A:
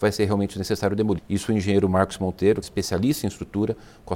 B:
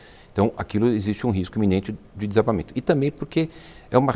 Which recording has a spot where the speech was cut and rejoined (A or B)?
A